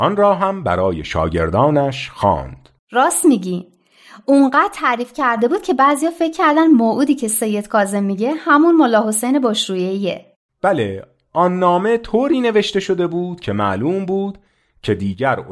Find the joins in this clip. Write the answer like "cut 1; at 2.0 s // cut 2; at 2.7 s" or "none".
cut 1; at 2.8 s